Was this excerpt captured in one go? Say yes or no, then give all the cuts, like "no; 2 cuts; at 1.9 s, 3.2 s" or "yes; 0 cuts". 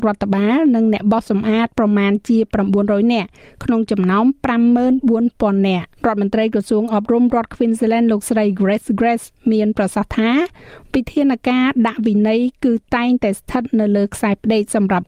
no; 1 cut; at 6.0 s